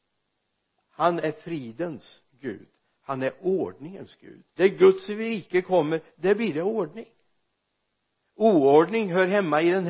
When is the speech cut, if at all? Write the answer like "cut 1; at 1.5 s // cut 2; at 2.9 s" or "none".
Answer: cut 1; at 4.5 s

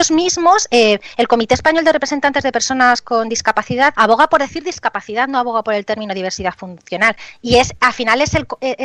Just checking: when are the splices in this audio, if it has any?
cut 1; at 3.9 s

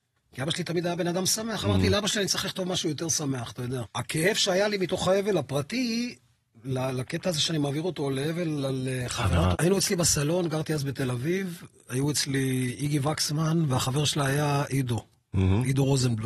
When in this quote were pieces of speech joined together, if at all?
cut 1; at 3.8 s // cut 2; at 9.5 s

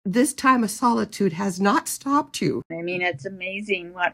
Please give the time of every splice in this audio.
cut 1; at 2.7 s

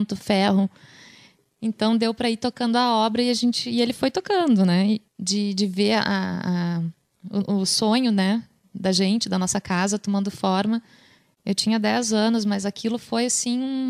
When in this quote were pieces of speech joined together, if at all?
cut 1; at 5.1 s

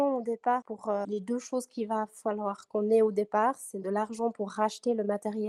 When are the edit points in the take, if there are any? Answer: cut 1; at 3.8 s

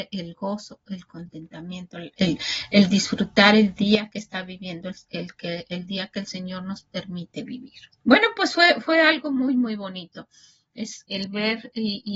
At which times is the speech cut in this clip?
cut 1; at 8.0 s // cut 2; at 11.0 s

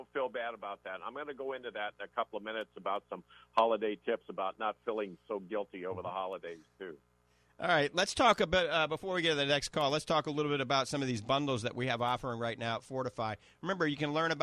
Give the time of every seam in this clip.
none

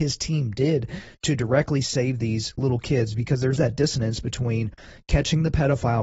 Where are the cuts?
cut 1; at 3.6 s

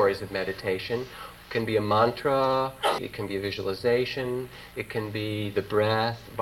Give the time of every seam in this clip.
cut 1; at 1.4 s // cut 2; at 3.0 s

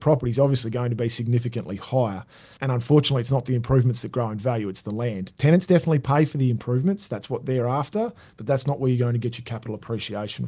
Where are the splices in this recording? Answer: cut 1; at 2.6 s

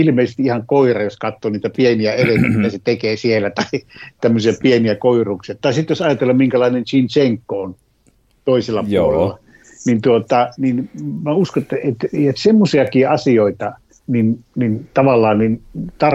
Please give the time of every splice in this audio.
cut 1; at 11.8 s // cut 2; at 14.1 s

